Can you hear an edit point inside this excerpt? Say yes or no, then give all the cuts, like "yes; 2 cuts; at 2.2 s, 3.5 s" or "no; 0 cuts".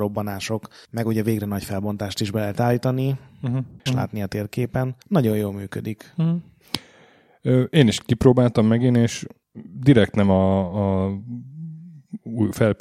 yes; 2 cuts; at 3.9 s, 5.0 s